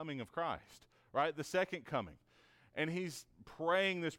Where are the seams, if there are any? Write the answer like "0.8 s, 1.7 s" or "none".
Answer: none